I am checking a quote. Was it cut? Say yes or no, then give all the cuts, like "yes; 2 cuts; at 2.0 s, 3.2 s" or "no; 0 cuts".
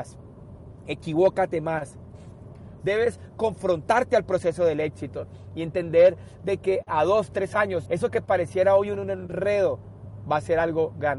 yes; 2 cuts; at 2.8 s, 7.9 s